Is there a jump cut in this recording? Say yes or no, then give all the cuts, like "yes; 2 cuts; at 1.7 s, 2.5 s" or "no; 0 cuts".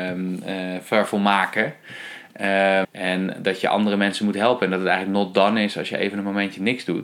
yes; 1 cut; at 2.8 s